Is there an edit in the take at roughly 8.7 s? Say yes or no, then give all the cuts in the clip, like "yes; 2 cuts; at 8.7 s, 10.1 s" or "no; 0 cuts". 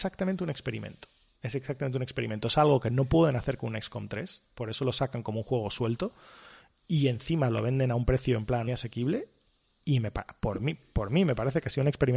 yes; 1 cut; at 8.7 s